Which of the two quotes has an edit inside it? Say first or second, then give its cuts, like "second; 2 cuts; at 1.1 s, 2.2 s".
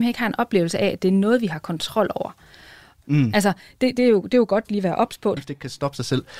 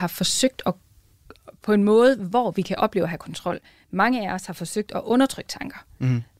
first; 2 cuts; at 3.0 s, 5.4 s